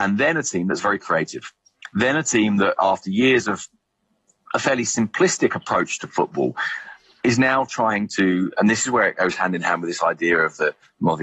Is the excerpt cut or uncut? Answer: uncut